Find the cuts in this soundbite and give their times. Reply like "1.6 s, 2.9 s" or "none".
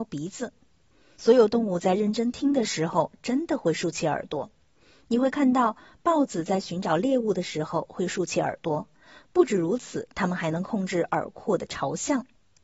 1.1 s